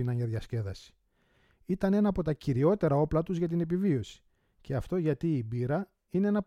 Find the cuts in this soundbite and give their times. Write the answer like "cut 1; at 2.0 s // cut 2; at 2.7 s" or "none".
none